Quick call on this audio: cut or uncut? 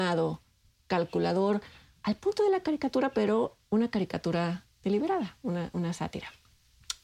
uncut